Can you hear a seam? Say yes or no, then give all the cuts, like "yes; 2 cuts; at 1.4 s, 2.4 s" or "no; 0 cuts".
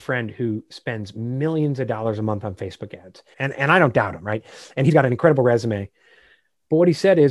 yes; 1 cut; at 3.3 s